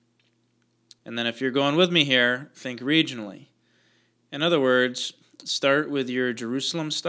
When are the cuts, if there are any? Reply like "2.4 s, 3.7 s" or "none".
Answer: 1.0 s

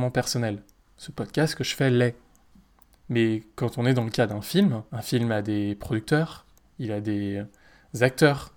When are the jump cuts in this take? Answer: 4.9 s, 6.6 s

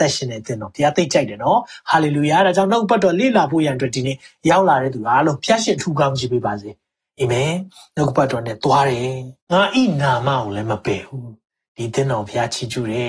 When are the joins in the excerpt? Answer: 9.4 s

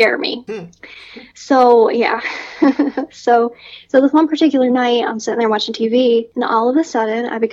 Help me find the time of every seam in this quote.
none

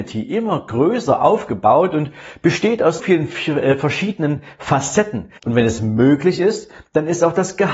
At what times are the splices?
3.0 s, 5.4 s

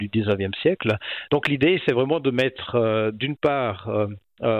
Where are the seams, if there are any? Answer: 1.3 s

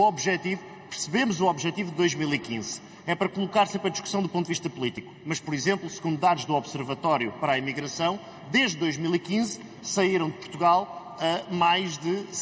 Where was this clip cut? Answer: none

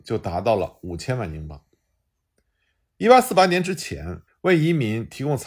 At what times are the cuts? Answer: 4.3 s

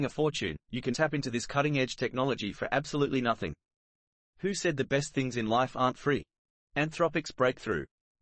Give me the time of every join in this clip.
0.9 s

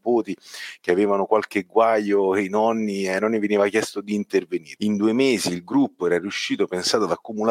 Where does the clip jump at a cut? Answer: 4.8 s

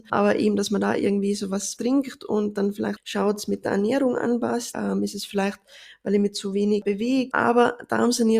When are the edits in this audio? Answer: 4.7 s, 7.3 s

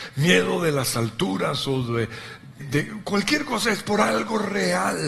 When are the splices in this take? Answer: 2.6 s

